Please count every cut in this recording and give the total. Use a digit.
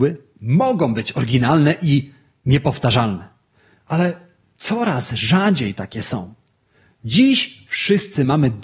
0